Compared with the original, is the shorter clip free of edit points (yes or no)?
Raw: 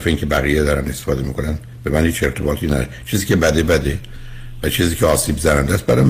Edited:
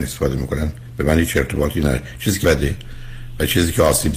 no